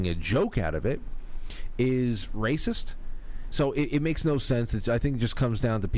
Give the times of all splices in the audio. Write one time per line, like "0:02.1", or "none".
none